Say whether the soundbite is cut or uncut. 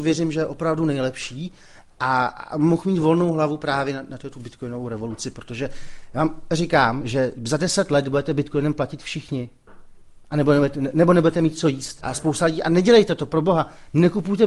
cut